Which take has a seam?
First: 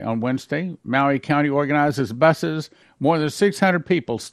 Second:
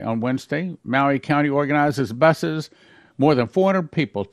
first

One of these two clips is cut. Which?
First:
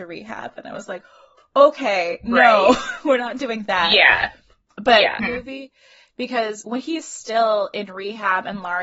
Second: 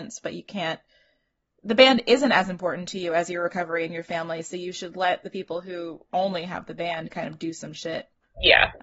first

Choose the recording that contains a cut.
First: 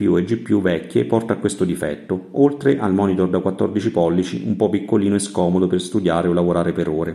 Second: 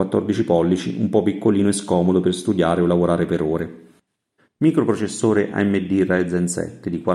second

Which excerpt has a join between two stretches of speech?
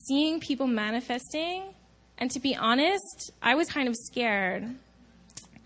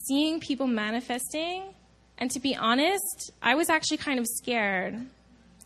first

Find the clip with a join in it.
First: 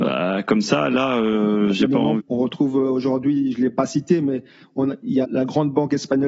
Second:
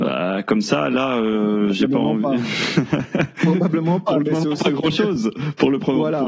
first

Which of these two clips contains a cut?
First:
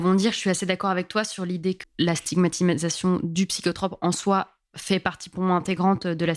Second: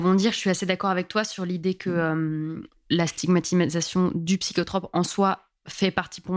first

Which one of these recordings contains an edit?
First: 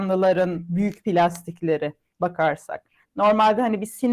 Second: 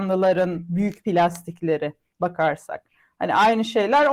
first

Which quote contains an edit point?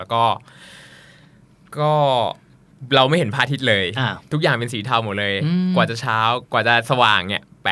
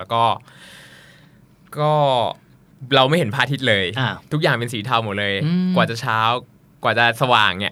first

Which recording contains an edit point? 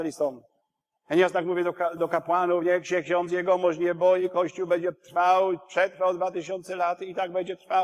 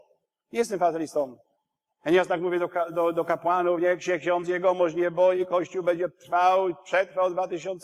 first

